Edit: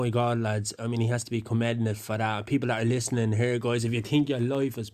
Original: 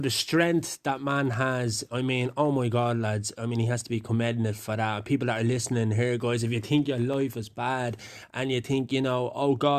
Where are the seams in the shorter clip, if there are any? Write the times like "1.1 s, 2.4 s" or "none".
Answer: none